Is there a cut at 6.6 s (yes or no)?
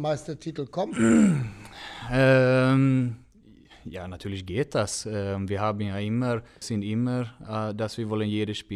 yes